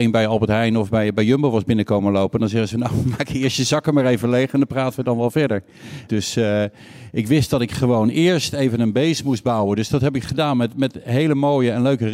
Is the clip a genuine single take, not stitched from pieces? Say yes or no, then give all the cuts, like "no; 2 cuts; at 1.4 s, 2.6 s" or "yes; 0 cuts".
no; 1 cut; at 6.1 s